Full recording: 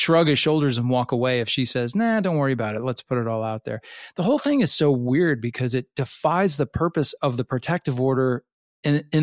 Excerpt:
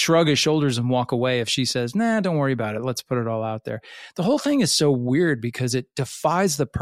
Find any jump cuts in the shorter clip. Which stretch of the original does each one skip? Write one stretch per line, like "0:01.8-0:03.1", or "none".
none